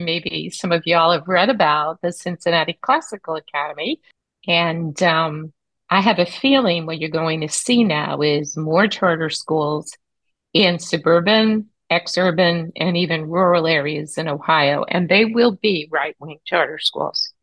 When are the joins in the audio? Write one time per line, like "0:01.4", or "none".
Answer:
none